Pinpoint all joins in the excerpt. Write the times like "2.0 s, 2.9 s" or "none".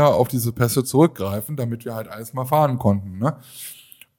none